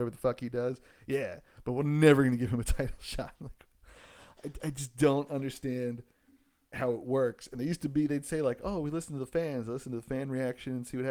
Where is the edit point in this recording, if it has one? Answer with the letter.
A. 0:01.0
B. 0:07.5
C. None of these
C